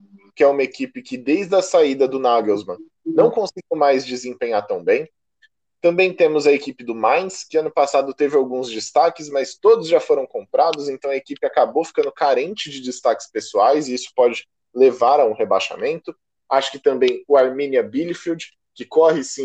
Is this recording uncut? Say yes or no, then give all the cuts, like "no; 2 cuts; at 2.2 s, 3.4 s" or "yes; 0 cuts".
yes; 0 cuts